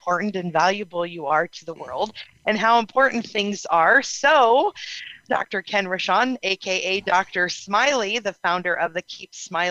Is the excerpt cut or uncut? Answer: cut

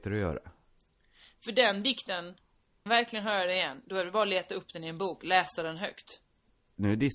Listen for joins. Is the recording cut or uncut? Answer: cut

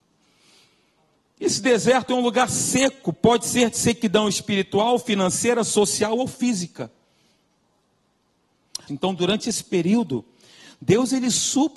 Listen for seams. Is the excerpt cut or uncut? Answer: cut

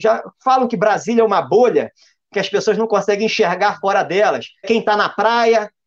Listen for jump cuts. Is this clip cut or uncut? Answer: cut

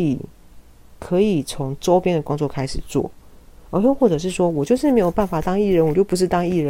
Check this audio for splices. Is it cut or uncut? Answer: uncut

